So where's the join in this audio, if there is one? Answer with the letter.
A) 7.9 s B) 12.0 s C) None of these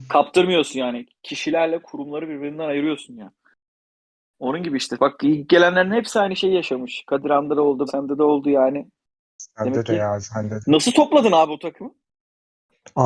A